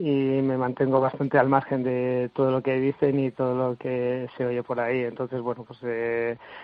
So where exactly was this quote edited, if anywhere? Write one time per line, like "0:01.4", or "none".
none